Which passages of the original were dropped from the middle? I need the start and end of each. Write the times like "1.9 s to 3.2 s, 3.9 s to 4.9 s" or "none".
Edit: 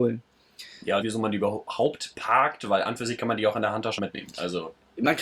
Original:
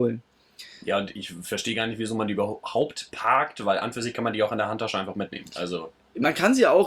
1.0 s to 2.0 s, 4.9 s to 5.1 s